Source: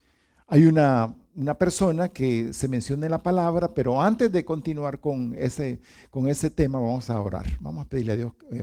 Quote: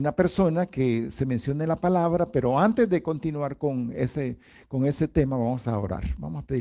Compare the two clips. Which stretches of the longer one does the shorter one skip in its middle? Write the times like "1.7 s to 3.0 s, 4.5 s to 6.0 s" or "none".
none